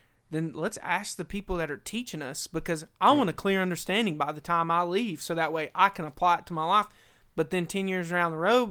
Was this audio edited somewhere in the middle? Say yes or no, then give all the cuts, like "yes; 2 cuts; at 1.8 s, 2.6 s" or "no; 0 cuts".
no; 0 cuts